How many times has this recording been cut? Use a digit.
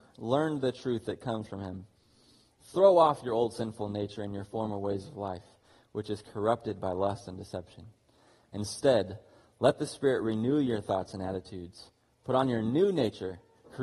0